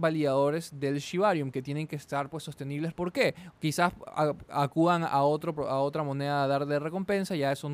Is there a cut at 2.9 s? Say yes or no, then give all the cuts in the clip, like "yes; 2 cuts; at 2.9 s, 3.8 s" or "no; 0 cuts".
yes; 1 cut; at 2.9 s